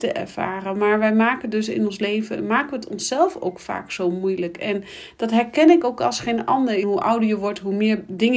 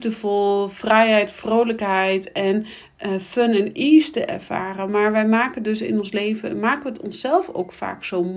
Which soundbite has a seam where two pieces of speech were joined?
first; 1 cut; at 6.8 s

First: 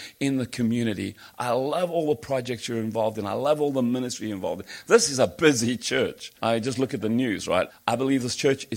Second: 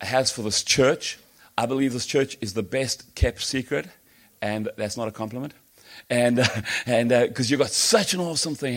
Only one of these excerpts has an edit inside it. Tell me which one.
first; 2 cuts; at 6.4 s, 7.7 s

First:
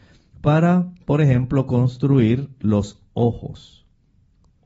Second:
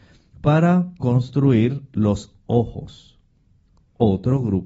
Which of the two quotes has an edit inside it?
second; 1 cut; at 1.0 s

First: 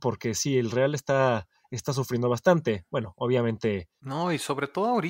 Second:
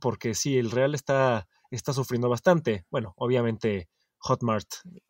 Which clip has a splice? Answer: first; 1 cut; at 4.0 s

